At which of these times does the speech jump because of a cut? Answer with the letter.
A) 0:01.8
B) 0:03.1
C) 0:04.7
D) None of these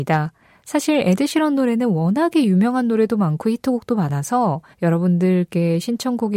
C